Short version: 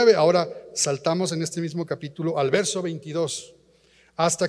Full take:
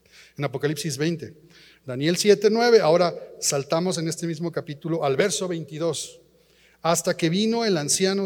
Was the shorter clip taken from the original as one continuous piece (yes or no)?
yes